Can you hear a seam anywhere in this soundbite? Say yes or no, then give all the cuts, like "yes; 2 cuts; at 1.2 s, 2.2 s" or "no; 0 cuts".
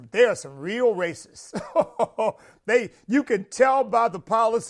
no; 0 cuts